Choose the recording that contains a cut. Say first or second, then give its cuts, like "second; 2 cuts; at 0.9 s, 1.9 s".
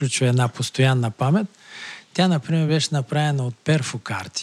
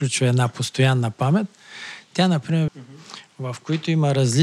second; 1 cut; at 2.7 s